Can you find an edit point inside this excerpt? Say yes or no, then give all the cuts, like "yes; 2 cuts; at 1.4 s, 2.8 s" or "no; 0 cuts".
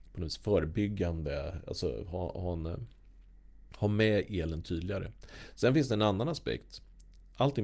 no; 0 cuts